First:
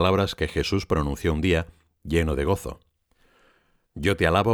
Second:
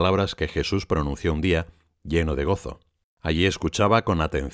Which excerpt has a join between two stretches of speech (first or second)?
second